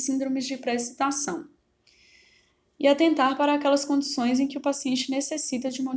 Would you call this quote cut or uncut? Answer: uncut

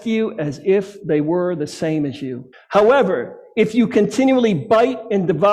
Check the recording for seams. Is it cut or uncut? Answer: cut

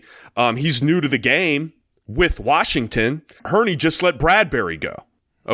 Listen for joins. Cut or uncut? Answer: cut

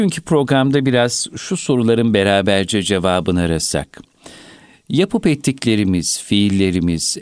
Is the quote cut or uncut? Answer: uncut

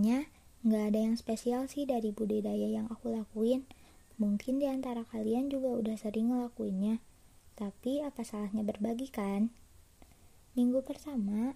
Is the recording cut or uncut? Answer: uncut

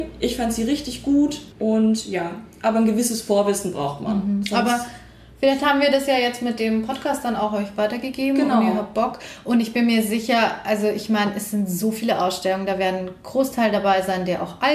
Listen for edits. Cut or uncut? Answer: uncut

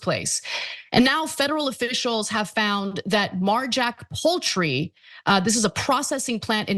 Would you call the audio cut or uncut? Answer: uncut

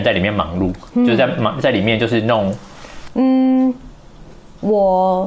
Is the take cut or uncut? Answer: cut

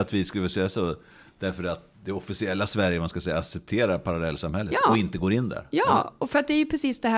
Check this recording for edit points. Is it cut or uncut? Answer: cut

